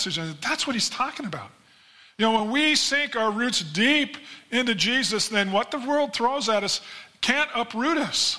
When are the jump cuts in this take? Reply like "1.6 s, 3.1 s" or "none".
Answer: none

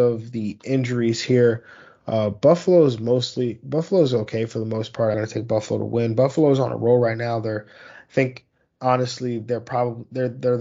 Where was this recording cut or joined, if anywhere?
5.1 s

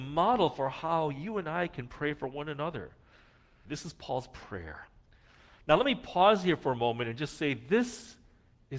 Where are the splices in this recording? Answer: 3.7 s

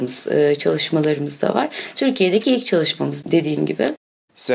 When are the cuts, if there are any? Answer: none

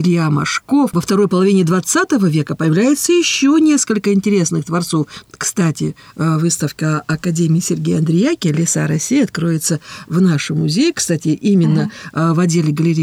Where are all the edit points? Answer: 5.2 s

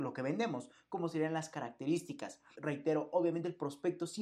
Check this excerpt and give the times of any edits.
2.5 s

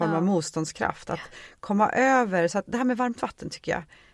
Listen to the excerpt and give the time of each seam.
none

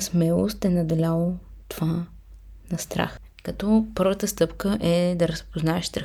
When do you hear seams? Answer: 3.4 s

